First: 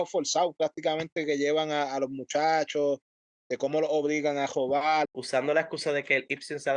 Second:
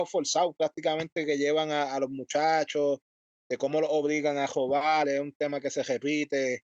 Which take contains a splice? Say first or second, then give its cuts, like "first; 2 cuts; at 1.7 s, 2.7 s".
first; 1 cut; at 5.1 s